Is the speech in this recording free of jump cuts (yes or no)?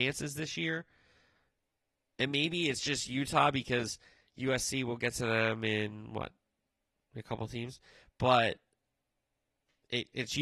yes